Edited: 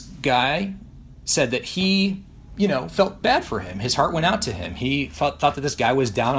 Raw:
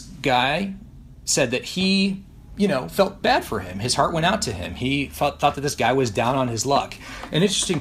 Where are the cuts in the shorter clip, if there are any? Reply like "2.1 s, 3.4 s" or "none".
none